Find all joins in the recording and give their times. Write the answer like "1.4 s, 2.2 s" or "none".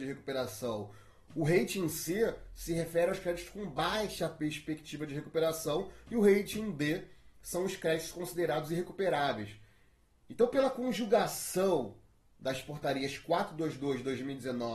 none